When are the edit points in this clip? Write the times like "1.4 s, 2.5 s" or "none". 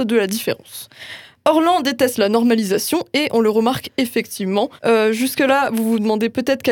4.8 s